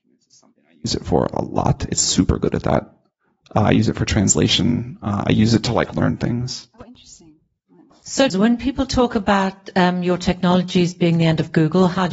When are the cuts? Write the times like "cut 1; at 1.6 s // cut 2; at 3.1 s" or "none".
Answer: cut 1; at 8.3 s